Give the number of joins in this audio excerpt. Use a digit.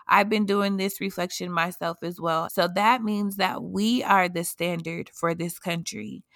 1